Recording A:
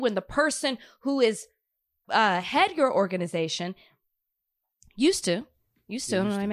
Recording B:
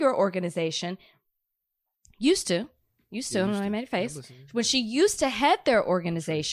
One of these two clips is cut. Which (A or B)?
A